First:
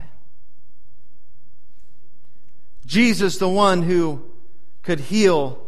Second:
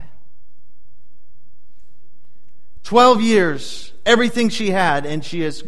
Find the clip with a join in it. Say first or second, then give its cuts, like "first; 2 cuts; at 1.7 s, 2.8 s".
second; 1 cut; at 2.8 s